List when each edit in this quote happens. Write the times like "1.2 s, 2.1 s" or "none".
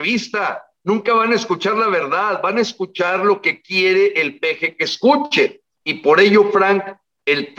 5.7 s